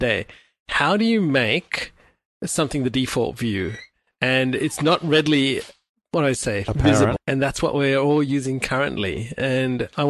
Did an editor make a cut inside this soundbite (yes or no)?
yes